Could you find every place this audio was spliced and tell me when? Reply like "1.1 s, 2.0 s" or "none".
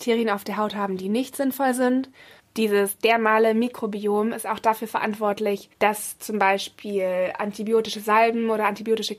2.4 s, 5.7 s